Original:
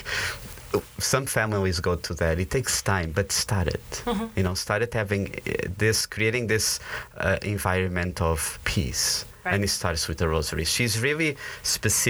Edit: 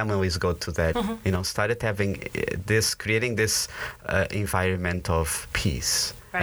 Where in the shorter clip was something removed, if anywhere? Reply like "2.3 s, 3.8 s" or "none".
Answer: 0.9 s